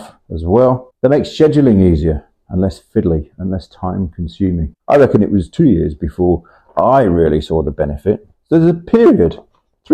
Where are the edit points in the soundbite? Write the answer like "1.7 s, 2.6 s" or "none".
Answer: 4.8 s, 8.3 s